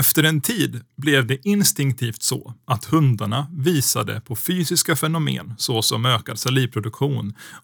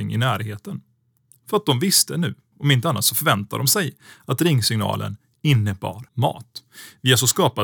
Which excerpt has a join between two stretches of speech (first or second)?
second